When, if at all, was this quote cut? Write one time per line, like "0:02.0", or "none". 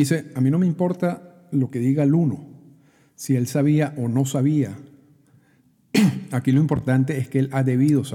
none